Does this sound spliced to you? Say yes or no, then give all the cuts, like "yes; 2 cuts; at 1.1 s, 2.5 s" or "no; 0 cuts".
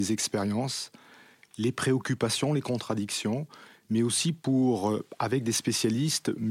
no; 0 cuts